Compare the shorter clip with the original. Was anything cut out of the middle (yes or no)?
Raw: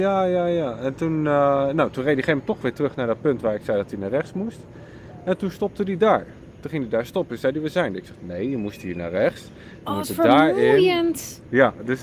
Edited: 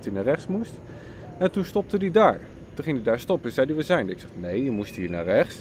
no